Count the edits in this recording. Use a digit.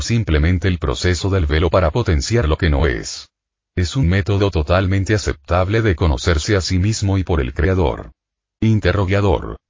0